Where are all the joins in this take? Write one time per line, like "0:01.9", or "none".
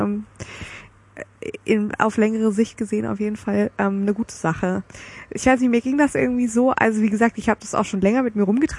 none